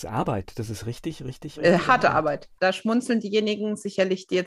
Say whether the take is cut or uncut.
cut